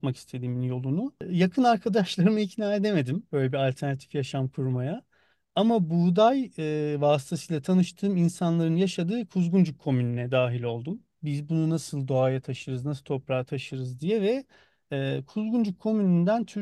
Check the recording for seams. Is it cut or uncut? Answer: cut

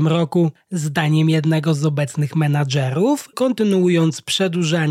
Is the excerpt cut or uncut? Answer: cut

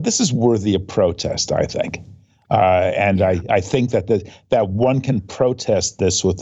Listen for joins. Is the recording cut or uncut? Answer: uncut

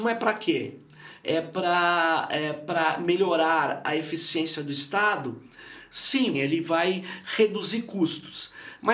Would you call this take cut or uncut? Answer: cut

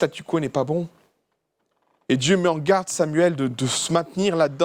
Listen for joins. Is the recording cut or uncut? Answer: uncut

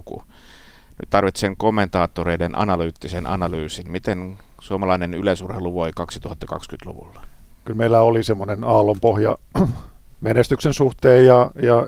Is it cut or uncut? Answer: cut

